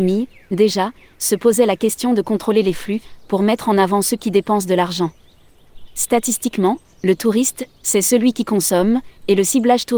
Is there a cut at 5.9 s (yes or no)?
no